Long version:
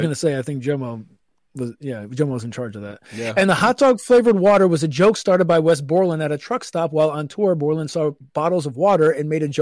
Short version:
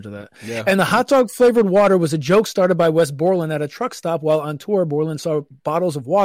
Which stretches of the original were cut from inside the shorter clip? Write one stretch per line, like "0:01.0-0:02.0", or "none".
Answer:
none